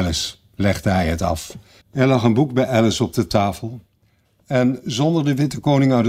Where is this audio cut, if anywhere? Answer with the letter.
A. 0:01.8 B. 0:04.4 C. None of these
A